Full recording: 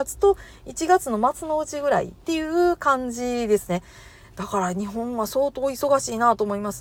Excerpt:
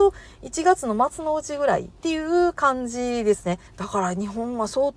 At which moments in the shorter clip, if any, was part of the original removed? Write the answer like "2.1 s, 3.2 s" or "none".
3.7 s